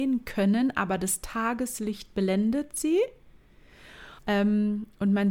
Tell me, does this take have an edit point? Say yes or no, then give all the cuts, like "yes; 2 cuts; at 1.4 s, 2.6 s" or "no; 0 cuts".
yes; 1 cut; at 4.2 s